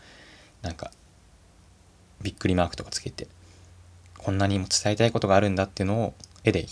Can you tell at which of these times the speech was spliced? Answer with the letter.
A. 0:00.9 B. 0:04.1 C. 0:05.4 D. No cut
D